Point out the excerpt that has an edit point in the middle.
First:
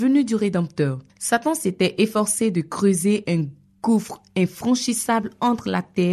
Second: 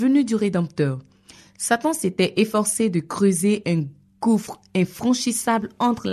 first; 1 cut; at 1.1 s

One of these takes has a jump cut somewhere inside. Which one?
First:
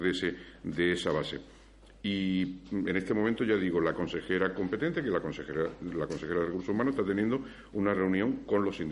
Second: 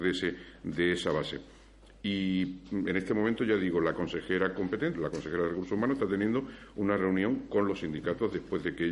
second; 1 cut; at 4.9 s

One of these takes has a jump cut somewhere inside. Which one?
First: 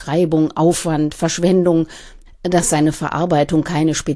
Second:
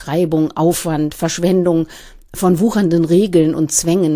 first; 1 cut; at 2.3 s

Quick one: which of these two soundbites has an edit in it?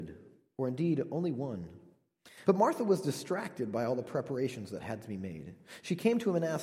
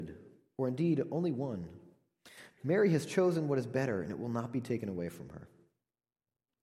first; 1 cut; at 2.4 s

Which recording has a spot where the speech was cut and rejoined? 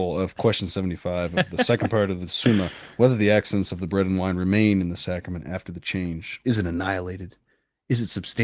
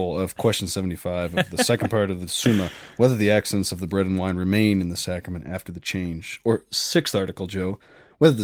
first; 1 cut; at 6.4 s

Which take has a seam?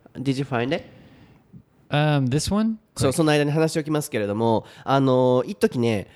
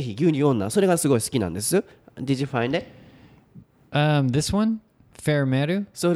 first; 1 cut; at 2.9 s

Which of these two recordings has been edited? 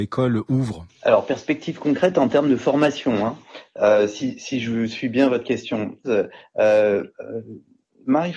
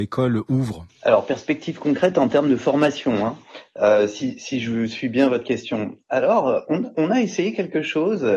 first; 1 cut; at 6.0 s

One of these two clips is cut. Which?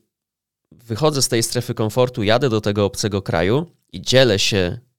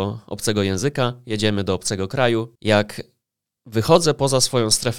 second; 1 cut; at 2.6 s

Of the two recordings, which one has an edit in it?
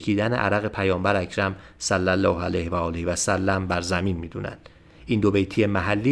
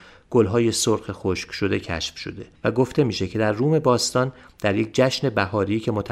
second; 1 cut; at 2.6 s

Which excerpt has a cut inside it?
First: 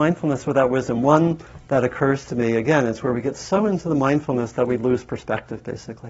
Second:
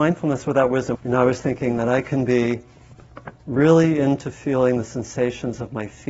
second; 2 cuts; at 0.9 s, 3.3 s

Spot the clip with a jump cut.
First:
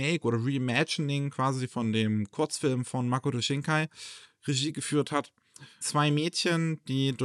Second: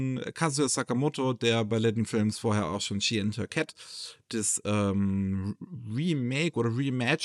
first; 1 cut; at 5.8 s

